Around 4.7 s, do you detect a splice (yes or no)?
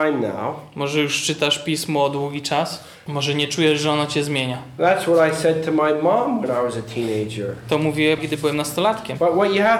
no